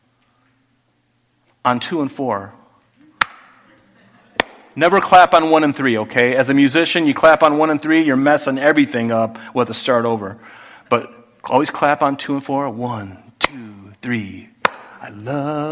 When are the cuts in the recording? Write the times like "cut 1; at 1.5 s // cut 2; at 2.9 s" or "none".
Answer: none